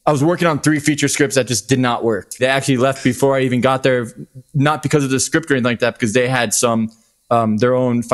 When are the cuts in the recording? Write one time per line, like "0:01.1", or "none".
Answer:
0:02.4